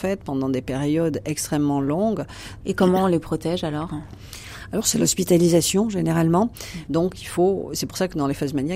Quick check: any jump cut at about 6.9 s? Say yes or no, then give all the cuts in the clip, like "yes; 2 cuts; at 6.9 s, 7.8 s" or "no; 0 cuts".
yes; 2 cuts; at 2.6 s, 6.9 s